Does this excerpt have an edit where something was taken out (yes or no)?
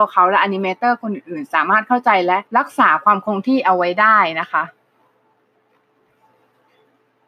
yes